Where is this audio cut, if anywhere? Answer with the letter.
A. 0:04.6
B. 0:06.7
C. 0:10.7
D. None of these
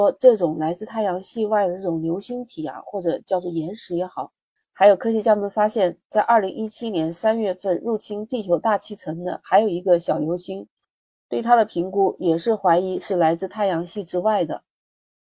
A